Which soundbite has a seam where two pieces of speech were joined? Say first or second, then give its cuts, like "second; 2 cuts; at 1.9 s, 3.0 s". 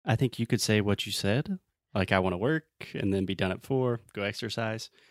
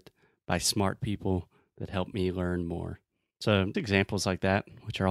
second; 1 cut; at 3.7 s